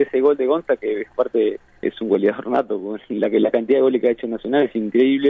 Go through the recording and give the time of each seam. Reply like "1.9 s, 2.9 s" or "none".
1.8 s